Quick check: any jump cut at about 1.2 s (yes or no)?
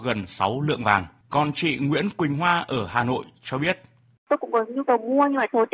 yes